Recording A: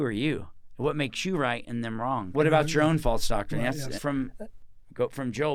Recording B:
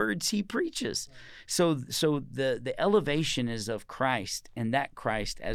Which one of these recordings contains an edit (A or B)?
A